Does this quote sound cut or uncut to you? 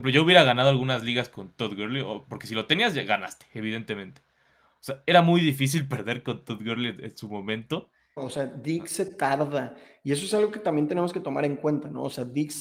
cut